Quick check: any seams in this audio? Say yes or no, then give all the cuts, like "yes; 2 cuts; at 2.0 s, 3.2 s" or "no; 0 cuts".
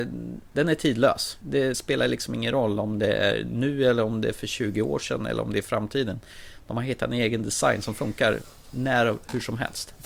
yes; 1 cut; at 1.7 s